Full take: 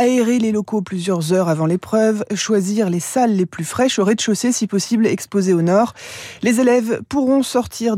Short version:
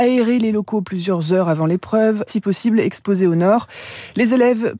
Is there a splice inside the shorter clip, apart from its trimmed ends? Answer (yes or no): yes